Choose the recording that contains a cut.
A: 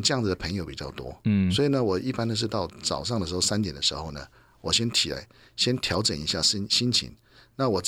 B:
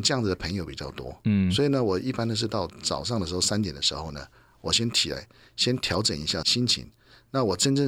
B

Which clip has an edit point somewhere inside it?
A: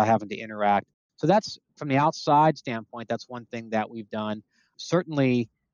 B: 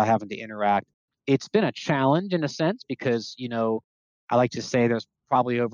B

